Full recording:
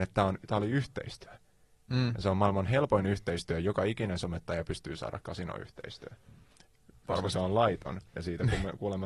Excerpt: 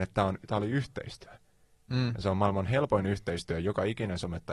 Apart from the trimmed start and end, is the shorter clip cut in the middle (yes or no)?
no